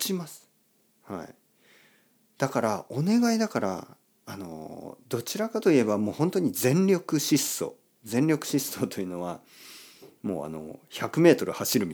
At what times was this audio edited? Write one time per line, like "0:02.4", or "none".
none